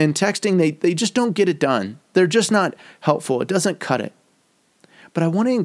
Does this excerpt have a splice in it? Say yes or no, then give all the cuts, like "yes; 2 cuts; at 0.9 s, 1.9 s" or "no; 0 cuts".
no; 0 cuts